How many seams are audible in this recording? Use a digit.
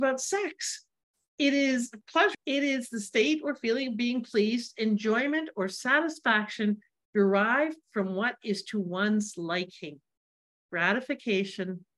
1